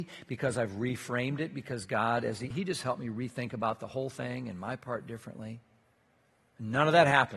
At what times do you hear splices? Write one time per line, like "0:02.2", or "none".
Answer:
0:02.5